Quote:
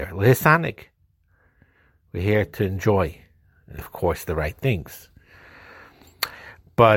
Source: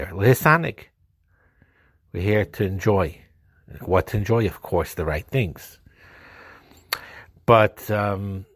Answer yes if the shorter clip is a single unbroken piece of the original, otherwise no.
no